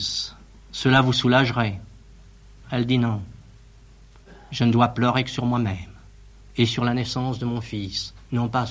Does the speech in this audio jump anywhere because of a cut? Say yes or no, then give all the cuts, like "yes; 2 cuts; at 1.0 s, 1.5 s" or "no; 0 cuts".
no; 0 cuts